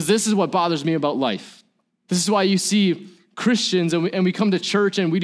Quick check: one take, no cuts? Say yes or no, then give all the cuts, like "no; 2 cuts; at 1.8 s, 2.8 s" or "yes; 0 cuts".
no; 1 cut; at 1.9 s